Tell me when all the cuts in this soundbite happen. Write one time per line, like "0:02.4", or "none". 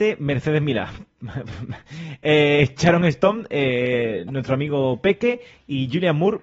none